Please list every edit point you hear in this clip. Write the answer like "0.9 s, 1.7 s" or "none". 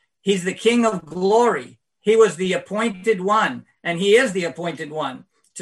1.8 s